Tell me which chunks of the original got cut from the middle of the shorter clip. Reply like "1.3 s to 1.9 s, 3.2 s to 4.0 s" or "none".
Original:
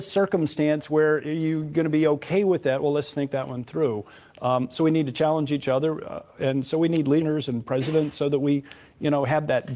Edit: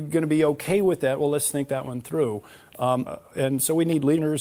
4.7 s to 6.1 s